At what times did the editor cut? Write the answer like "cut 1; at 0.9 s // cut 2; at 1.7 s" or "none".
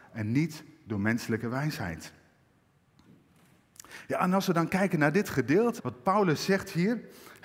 cut 1; at 5.8 s